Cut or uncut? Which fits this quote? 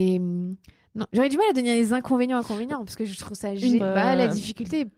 cut